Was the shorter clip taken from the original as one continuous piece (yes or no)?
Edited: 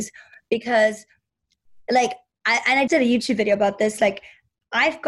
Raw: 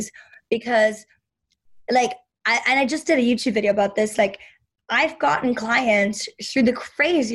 no